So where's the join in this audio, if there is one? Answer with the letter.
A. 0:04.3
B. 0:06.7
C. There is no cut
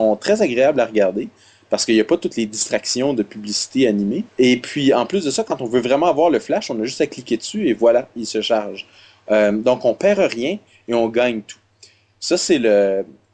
A